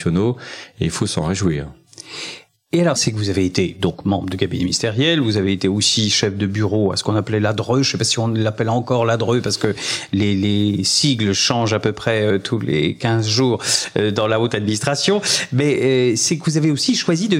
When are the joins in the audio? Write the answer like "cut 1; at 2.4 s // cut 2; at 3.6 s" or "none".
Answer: cut 1; at 3.0 s